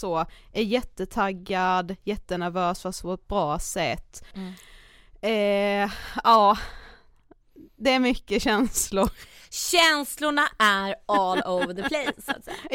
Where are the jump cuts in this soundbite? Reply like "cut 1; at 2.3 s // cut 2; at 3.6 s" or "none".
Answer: cut 1; at 4.3 s